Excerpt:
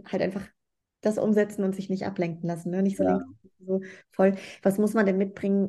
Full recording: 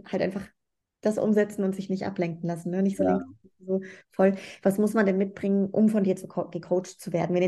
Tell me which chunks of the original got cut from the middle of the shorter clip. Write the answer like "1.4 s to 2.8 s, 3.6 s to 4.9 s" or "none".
none